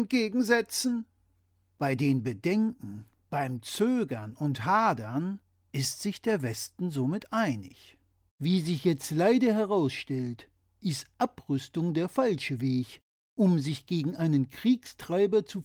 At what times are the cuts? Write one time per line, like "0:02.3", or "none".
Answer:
0:01.6
0:08.3